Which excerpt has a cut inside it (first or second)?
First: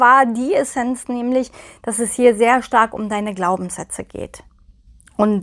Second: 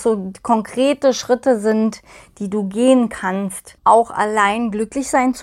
second